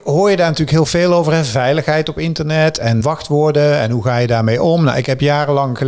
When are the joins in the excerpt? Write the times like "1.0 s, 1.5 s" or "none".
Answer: 3.0 s